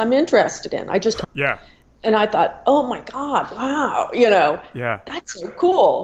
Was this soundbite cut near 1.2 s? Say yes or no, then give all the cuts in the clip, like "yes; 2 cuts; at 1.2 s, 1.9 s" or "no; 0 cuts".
yes; 1 cut; at 1.2 s